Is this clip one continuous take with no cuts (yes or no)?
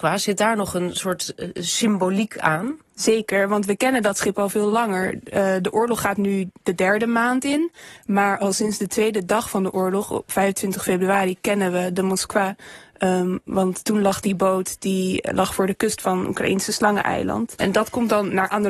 no